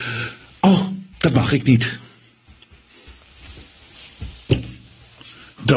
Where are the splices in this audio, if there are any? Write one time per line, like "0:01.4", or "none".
0:01.1

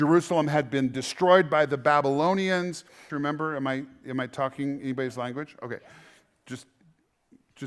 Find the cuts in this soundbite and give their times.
0:03.1

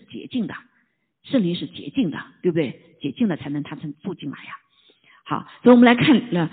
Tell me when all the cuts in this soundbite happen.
none

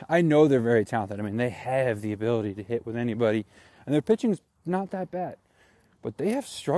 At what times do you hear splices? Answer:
none

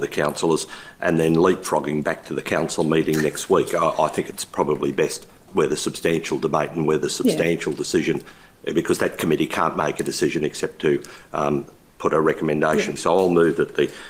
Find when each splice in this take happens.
0:05.5
0:13.0

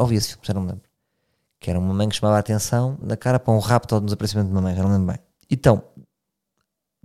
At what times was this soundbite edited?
0:03.0
0:05.4

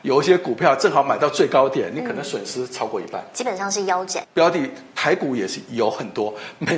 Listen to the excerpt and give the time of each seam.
0:04.2

